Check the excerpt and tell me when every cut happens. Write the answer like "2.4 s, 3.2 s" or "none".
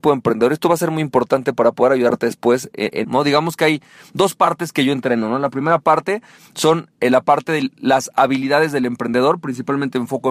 3.0 s